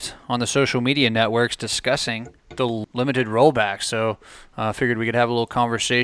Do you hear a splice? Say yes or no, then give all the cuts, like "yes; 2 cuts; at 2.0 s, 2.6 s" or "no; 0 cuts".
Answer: yes; 1 cut; at 2.4 s